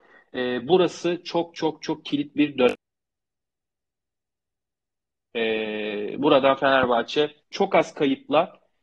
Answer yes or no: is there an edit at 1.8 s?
yes